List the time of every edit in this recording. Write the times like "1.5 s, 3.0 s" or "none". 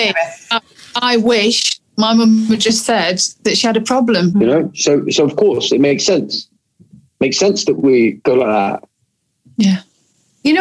4.3 s, 9.4 s

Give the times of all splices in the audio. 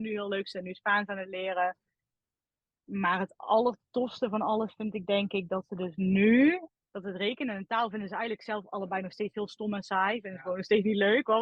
6.7 s

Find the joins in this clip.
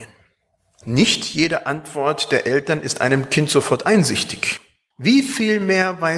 4.9 s

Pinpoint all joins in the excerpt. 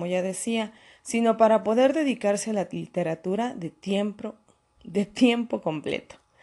none

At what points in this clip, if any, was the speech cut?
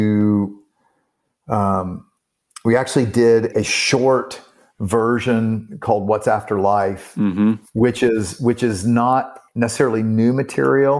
3.5 s, 9.5 s

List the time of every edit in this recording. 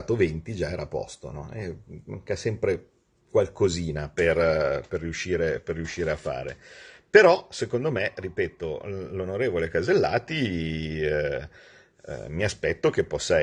4.9 s

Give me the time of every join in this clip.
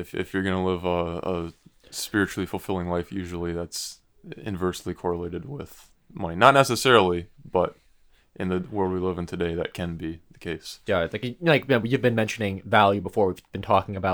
10.9 s

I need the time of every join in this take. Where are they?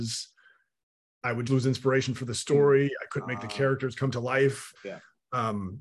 1.5 s, 4.8 s

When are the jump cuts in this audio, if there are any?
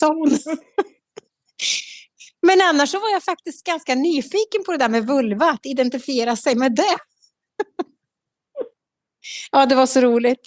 none

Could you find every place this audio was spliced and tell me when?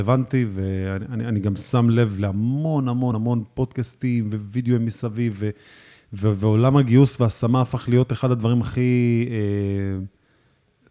3.1 s

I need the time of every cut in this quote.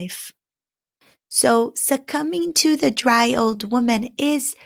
none

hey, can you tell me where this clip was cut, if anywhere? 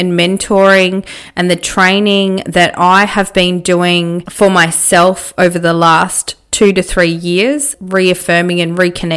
7.7 s

